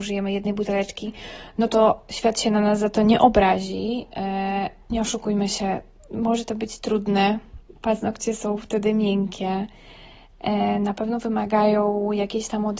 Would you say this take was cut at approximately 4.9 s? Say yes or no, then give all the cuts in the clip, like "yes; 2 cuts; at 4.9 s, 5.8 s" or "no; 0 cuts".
yes; 1 cut; at 4.9 s